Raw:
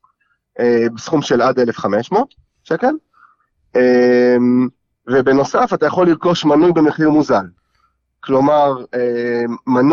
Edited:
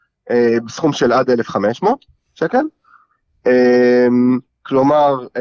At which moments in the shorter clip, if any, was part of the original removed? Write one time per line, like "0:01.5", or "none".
0:04.5